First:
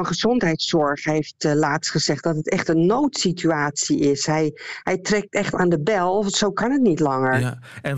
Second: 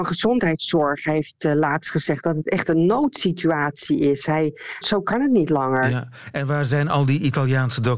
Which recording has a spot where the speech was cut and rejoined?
second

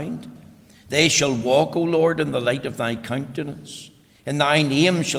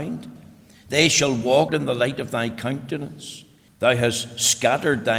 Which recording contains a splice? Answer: second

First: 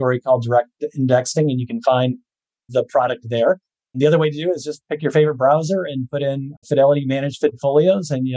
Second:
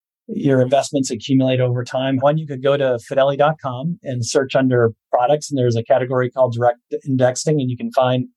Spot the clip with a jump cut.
second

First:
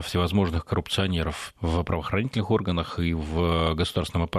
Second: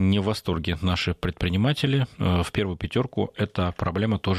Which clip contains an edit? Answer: first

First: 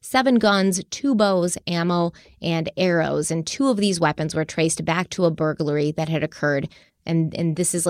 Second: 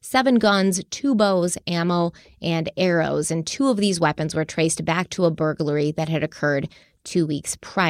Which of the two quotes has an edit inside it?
first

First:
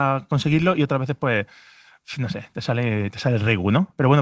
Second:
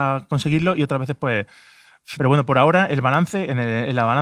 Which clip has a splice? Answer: second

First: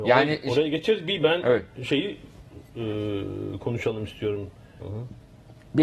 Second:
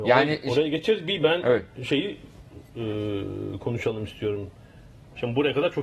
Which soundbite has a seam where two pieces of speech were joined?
first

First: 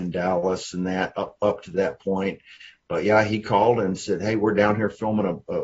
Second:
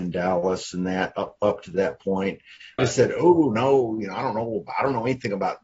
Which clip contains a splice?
second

